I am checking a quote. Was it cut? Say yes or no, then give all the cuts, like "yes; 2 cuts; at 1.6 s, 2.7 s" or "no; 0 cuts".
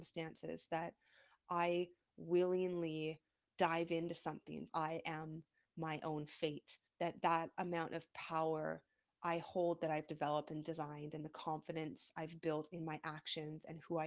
yes; 2 cuts; at 4.7 s, 6.9 s